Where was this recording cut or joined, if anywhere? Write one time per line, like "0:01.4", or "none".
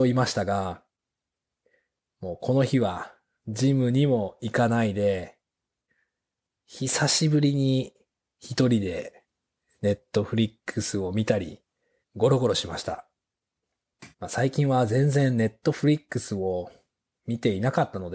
0:12.0
0:14.1